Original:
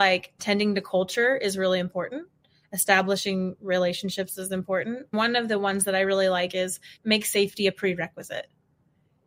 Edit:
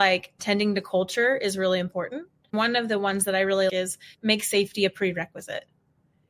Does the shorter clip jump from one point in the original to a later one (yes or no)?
yes